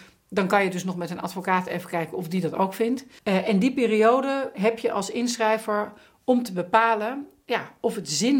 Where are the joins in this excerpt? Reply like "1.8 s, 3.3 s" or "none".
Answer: 3.2 s, 4.5 s

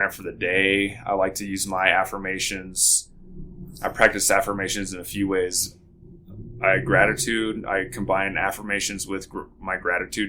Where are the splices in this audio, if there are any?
none

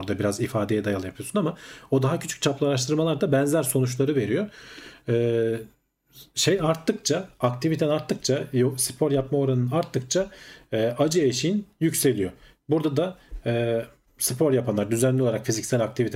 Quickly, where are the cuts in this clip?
14.0 s

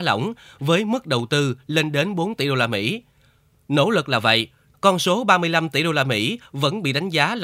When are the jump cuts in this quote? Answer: 4.7 s

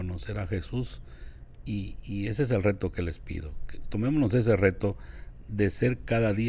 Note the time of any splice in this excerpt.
none

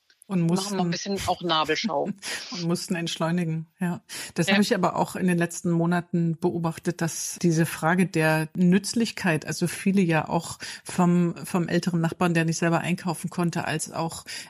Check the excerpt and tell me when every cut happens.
none

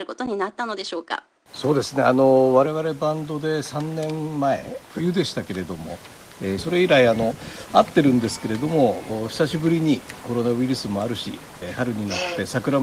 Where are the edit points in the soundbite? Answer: 6.6 s

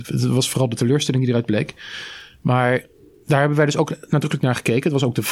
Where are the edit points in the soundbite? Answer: none

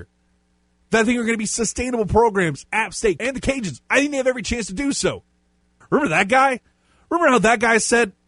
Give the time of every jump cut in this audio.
3.2 s, 5.8 s

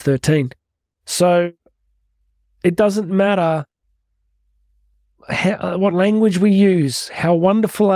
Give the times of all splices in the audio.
none

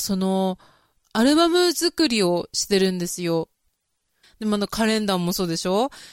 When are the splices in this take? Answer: 4.2 s

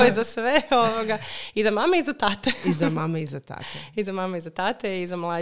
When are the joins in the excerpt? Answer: none

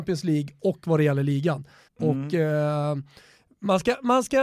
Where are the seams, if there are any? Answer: 1.9 s

